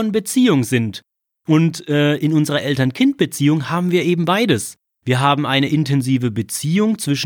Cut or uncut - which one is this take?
uncut